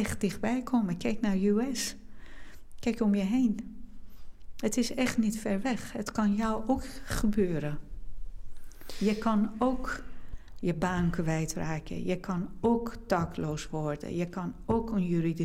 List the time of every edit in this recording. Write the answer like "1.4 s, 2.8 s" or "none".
none